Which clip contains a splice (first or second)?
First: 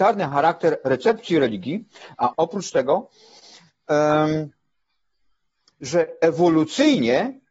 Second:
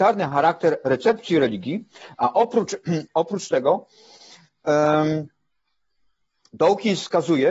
first